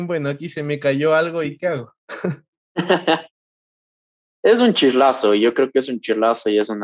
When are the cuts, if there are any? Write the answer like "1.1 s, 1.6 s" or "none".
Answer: none